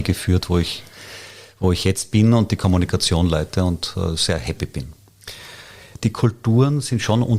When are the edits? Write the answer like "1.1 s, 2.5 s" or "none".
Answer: 6.0 s